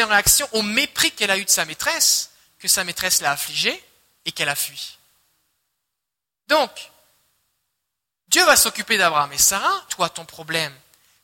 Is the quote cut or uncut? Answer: cut